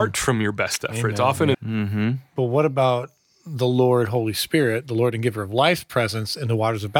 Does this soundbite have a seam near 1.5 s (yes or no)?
yes